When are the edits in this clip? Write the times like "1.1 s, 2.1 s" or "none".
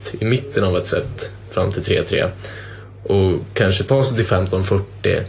none